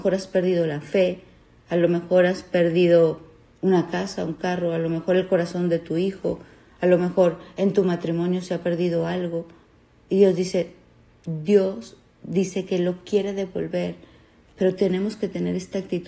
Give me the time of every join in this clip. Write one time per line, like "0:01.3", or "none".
0:10.1